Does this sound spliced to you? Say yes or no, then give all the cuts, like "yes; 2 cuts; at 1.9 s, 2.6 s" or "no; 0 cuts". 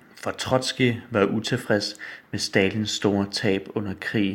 no; 0 cuts